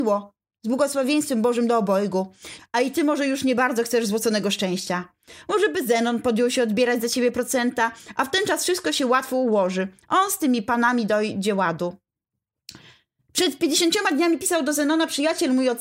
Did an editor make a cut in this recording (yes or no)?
yes